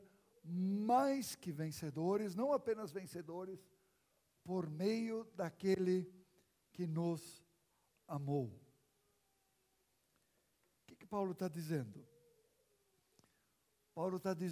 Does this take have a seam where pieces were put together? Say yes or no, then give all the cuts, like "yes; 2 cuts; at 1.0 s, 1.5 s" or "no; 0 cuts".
no; 0 cuts